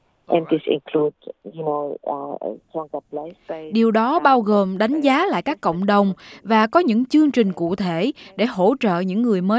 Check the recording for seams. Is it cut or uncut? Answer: uncut